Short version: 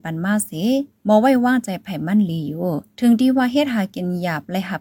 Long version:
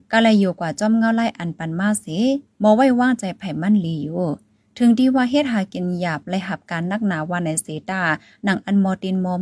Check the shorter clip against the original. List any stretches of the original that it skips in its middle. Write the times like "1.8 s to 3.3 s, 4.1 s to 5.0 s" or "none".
4.5 s to 4.7 s